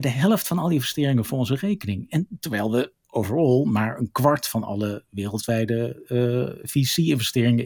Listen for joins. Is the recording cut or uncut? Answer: uncut